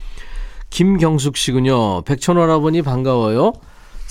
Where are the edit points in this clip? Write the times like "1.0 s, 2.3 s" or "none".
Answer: none